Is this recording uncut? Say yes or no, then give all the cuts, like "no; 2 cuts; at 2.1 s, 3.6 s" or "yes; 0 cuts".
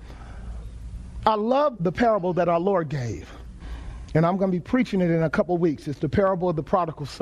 no; 1 cut; at 1.7 s